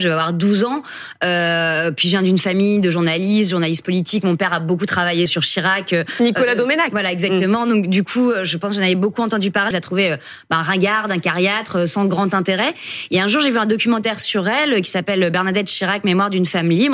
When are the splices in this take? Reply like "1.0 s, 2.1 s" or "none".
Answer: 5.3 s, 9.7 s